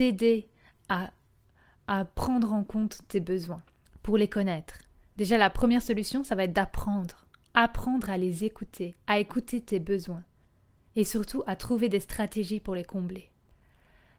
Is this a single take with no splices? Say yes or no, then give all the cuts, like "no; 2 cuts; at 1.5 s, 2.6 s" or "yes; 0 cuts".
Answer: yes; 0 cuts